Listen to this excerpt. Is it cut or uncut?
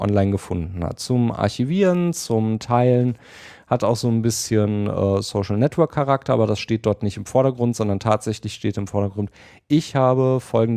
uncut